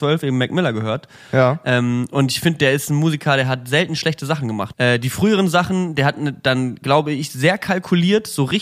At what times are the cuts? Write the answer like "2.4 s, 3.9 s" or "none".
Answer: 4.7 s